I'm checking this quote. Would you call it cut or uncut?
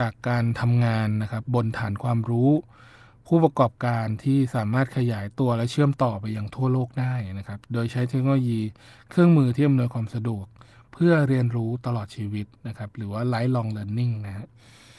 cut